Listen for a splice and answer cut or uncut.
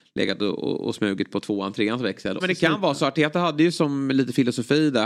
cut